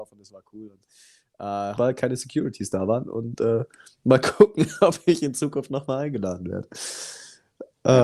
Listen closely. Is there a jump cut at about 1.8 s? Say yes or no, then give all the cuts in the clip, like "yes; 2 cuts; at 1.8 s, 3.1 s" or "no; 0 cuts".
yes; 1 cut; at 1.8 s